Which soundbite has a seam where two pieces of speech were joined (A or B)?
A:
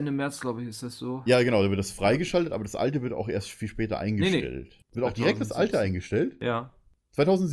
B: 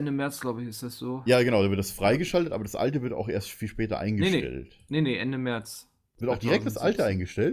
A